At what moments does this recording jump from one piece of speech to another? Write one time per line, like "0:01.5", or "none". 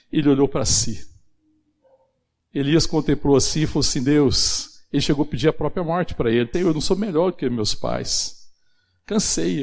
0:06.5